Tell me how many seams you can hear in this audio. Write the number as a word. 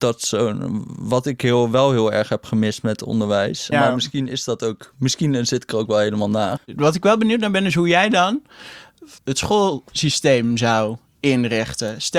three